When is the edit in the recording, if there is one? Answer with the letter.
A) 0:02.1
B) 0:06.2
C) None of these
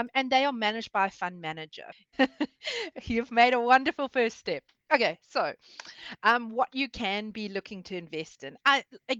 A